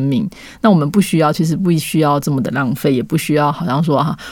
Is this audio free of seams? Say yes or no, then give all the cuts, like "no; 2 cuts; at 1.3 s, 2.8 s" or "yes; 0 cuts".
yes; 0 cuts